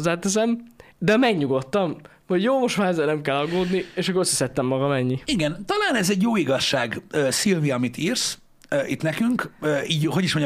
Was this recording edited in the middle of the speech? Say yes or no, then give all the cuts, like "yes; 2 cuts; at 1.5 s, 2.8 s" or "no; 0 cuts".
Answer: no; 0 cuts